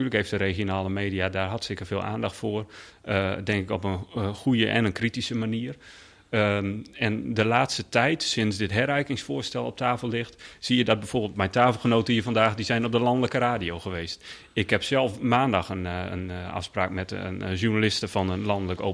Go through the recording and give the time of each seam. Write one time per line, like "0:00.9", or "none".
none